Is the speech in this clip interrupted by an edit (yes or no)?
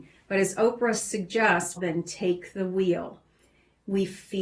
yes